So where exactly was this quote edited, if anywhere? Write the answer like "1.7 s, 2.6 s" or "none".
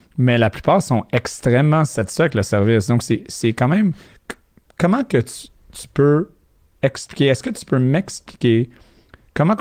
none